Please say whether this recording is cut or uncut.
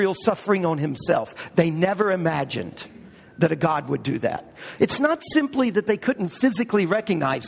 cut